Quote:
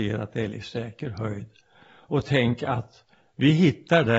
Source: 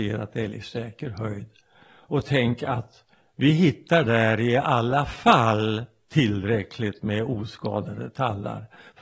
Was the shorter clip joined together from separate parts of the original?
no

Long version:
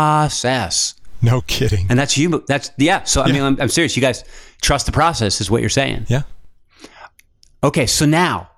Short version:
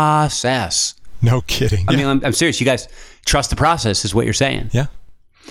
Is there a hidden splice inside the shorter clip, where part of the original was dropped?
yes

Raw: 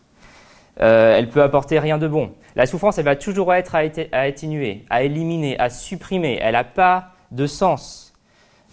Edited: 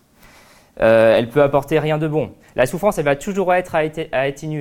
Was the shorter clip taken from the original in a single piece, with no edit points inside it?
yes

